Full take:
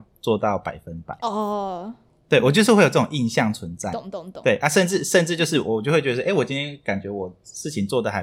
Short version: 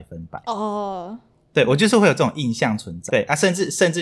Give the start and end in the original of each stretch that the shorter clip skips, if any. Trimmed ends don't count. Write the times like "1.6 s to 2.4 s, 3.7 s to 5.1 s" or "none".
3.8 s to 4.4 s